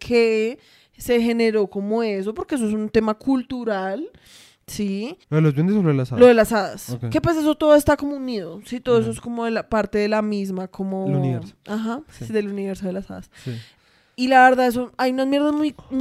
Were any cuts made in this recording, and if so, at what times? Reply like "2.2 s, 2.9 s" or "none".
5.2 s